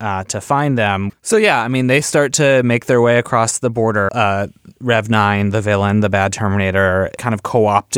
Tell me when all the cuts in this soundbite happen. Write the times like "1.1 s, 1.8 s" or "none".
1.1 s, 4.1 s